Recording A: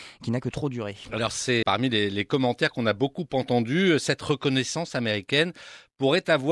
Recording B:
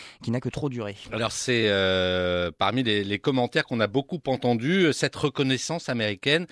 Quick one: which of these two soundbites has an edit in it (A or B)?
A